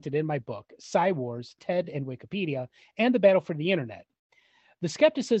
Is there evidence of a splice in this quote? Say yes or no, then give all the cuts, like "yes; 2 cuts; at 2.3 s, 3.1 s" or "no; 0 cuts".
no; 0 cuts